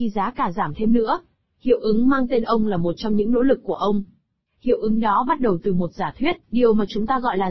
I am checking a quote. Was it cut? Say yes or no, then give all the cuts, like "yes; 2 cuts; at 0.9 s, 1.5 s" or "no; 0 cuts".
yes; 2 cuts; at 1.5 s, 6.4 s